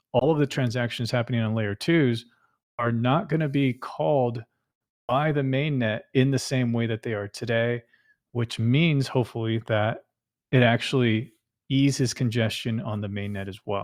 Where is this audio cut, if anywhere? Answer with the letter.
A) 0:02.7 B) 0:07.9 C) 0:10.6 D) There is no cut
D